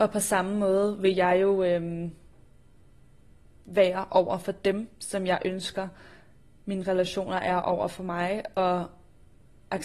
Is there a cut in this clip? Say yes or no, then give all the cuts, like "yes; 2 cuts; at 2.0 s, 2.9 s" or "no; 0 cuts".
no; 0 cuts